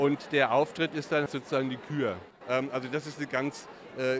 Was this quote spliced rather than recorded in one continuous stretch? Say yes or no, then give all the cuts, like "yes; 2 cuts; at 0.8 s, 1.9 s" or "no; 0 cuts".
yes; 2 cuts; at 1.3 s, 2.4 s